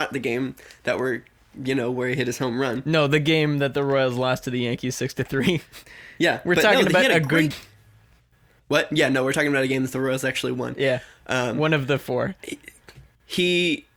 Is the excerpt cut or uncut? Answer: cut